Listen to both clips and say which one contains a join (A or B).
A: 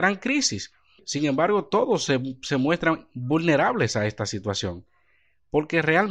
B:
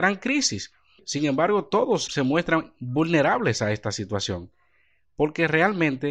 B